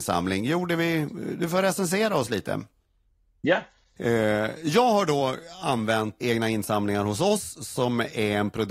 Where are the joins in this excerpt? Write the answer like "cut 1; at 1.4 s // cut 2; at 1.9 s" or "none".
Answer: cut 1; at 4.0 s // cut 2; at 6.2 s